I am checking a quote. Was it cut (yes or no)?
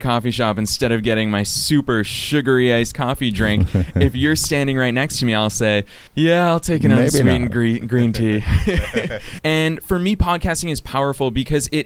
yes